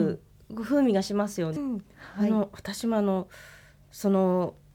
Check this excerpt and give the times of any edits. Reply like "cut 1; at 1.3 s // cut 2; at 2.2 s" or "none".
cut 1; at 1.6 s